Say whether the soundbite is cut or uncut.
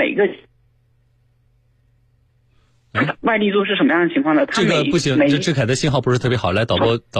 uncut